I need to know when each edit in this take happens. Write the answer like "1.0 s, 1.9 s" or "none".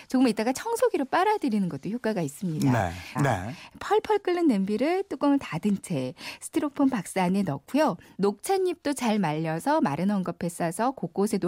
3.2 s, 8.1 s